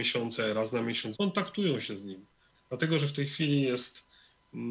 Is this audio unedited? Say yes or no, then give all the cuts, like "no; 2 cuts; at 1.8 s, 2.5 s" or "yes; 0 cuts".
no; 2 cuts; at 1.1 s, 2.5 s